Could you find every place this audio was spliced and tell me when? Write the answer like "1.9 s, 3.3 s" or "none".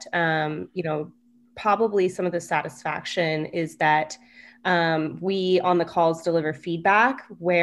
none